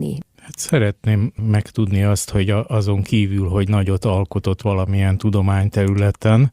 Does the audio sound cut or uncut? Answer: uncut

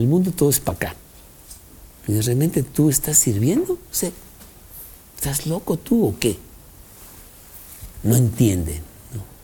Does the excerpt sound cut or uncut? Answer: uncut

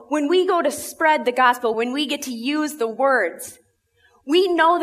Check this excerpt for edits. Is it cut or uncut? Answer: cut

